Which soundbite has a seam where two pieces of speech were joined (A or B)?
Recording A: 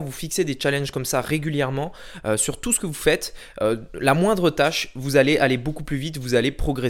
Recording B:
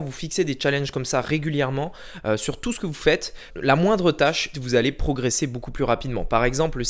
B